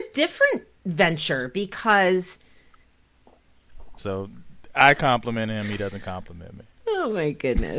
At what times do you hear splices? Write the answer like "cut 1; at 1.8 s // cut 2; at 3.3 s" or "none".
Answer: cut 1; at 4.0 s